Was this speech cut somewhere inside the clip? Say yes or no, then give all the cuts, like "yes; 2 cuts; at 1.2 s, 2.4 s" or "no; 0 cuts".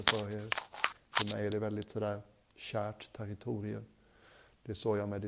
no; 0 cuts